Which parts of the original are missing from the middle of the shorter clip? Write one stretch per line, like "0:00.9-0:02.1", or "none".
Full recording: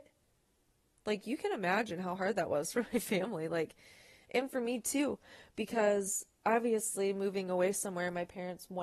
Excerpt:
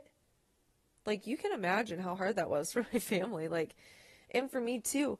none